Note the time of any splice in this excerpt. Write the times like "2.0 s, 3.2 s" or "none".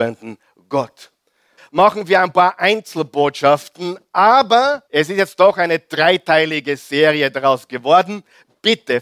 1.6 s, 4.9 s